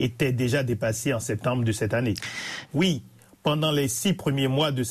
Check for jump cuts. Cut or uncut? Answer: cut